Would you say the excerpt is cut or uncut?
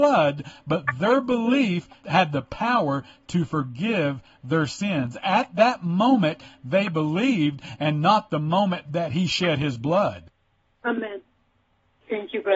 uncut